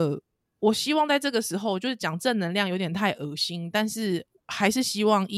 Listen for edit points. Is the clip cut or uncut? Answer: uncut